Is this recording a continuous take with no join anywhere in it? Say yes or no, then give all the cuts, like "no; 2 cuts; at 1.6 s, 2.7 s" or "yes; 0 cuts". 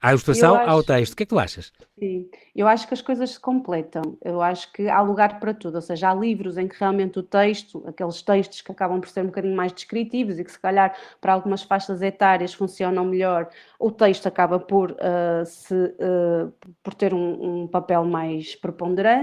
yes; 0 cuts